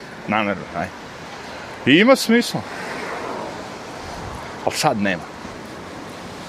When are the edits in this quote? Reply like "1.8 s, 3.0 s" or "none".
none